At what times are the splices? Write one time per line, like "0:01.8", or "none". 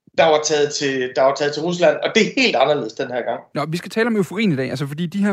0:03.5